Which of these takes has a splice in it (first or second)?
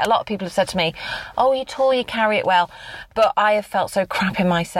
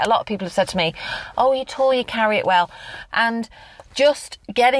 second